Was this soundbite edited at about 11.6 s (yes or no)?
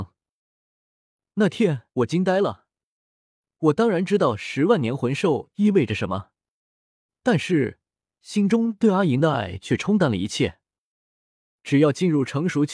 yes